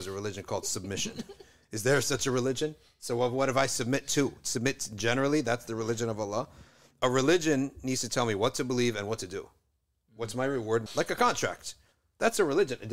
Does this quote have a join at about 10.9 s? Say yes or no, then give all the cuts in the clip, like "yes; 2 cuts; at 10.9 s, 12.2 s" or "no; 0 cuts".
yes; 1 cut; at 10.9 s